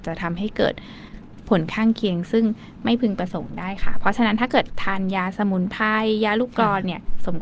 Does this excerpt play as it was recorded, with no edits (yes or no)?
yes